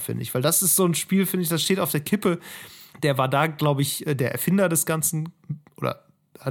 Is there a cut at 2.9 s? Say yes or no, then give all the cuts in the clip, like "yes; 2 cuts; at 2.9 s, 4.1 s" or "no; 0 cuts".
yes; 1 cut; at 2.9 s